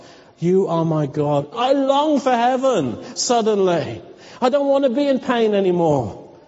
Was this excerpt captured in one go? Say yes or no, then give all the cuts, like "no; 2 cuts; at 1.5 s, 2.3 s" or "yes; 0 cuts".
no; 1 cut; at 1.5 s